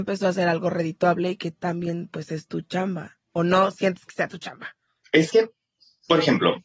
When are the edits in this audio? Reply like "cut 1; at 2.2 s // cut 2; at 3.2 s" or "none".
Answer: cut 1; at 3.2 s